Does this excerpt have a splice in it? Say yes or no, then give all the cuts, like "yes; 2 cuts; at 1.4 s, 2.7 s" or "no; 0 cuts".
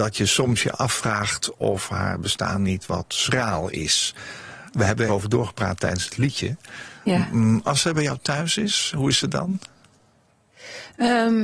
yes; 1 cut; at 5.1 s